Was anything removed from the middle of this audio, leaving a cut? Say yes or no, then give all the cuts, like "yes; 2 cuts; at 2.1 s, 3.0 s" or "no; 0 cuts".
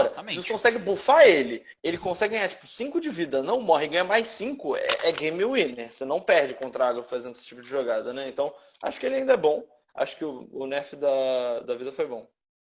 no; 0 cuts